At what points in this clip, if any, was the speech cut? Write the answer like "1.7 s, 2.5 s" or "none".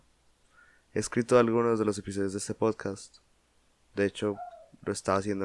none